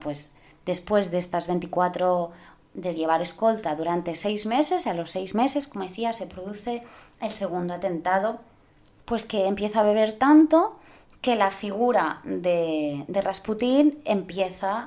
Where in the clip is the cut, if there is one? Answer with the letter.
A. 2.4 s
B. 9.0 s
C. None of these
B